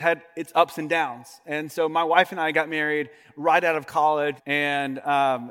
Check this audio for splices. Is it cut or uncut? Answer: cut